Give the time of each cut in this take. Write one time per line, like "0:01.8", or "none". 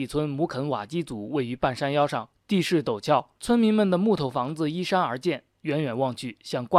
0:03.4